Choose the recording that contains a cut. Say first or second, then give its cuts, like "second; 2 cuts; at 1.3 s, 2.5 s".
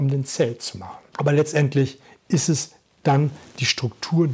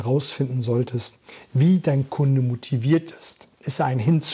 first; 1 cut; at 1.1 s